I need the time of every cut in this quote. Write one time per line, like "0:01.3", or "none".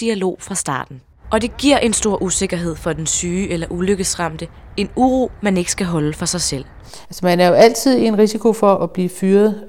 0:01.2
0:07.0
0:08.8